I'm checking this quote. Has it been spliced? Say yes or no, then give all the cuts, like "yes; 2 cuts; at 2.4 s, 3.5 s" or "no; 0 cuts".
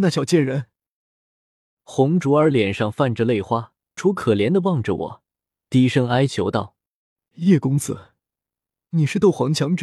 yes; 1 cut; at 4.0 s